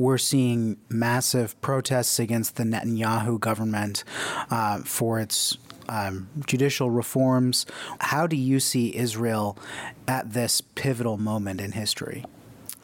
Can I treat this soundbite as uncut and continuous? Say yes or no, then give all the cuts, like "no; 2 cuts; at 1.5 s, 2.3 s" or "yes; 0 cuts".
no; 1 cut; at 8.0 s